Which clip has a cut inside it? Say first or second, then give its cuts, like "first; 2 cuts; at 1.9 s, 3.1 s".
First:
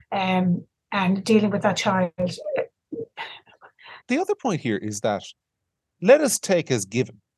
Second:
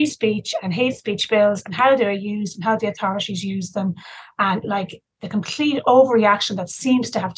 first; 1 cut; at 4.0 s